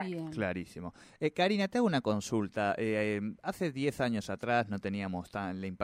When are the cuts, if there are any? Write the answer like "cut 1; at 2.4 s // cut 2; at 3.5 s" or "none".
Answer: none